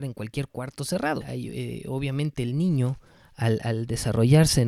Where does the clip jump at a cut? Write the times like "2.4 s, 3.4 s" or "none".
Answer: 1.2 s